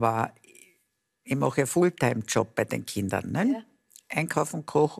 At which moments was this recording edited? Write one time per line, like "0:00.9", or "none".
none